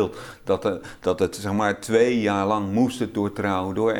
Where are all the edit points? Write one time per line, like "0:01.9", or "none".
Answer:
none